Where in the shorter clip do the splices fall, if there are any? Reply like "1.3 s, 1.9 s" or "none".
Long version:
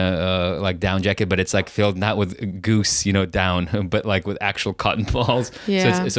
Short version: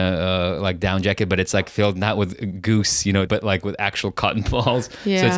3.3 s